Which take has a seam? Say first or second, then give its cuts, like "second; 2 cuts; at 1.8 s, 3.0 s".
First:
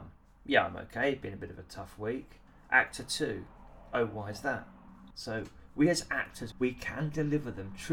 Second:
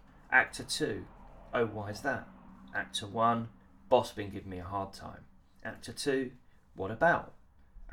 first; 2 cuts; at 5.1 s, 6.5 s